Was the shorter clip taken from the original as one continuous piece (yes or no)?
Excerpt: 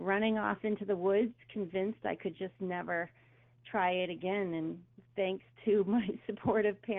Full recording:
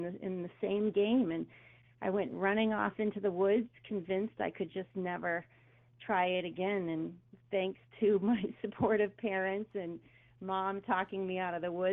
yes